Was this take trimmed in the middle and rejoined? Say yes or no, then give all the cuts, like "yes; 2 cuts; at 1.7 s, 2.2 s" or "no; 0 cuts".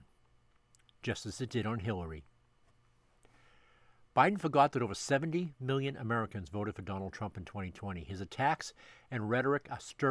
no; 0 cuts